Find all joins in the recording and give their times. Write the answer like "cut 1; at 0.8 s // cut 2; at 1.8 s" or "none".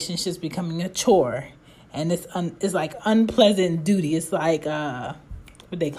none

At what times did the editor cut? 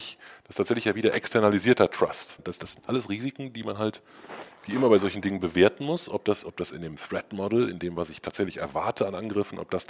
cut 1; at 2.4 s

